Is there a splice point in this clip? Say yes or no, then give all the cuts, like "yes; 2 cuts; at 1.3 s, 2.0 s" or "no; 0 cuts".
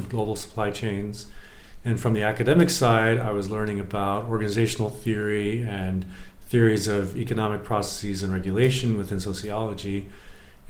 no; 0 cuts